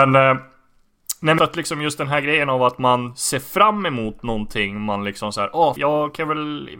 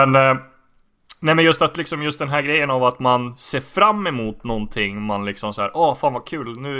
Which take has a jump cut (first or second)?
first